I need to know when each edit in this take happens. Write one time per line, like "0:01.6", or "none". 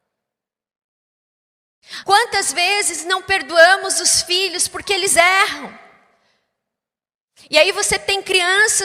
0:02.0